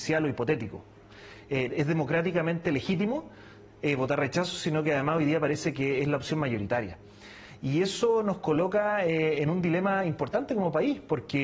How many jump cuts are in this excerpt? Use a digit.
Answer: 1